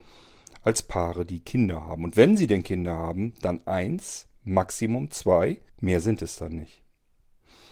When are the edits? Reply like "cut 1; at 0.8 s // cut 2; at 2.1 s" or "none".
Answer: cut 1; at 5.7 s